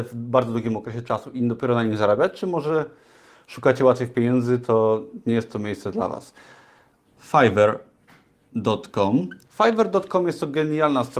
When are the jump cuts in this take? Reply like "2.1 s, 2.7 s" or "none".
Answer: 7.0 s, 9.4 s